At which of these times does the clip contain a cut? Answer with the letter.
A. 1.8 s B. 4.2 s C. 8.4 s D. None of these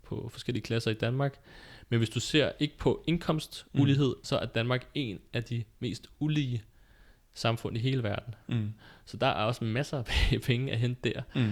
B